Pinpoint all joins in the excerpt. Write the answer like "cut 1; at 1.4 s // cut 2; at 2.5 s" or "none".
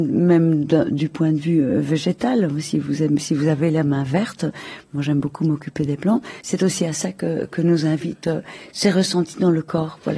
cut 1; at 6.4 s